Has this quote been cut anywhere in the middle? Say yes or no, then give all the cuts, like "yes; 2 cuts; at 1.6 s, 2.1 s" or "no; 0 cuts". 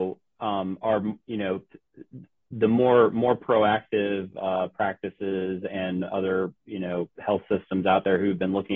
no; 0 cuts